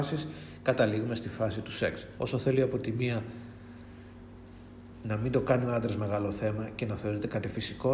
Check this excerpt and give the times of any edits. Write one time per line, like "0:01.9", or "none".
0:02.2